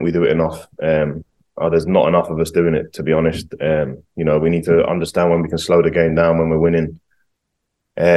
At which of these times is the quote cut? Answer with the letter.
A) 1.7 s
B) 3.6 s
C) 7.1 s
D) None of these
D